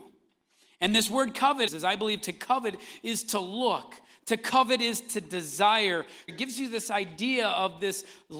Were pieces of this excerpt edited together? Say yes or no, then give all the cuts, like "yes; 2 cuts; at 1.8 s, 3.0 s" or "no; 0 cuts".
yes; 2 cuts; at 1.7 s, 6.3 s